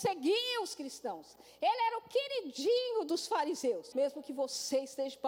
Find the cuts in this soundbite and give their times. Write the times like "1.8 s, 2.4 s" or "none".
3.9 s